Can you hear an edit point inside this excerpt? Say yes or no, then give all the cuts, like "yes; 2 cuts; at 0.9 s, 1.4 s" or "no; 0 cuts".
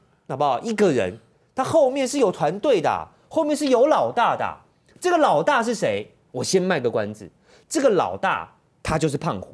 no; 0 cuts